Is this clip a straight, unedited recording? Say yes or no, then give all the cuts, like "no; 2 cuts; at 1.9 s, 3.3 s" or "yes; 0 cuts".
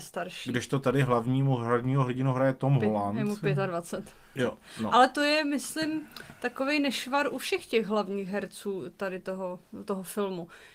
no; 1 cut; at 4.4 s